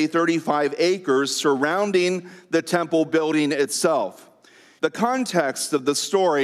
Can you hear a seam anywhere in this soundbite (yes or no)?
yes